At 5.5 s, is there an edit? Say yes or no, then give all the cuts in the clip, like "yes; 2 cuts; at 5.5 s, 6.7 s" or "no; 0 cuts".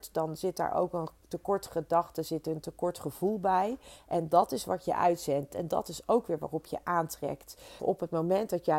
yes; 2 cuts; at 5.5 s, 7.8 s